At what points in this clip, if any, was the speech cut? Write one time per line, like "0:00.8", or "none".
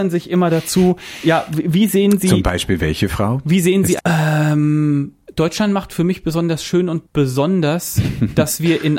0:04.0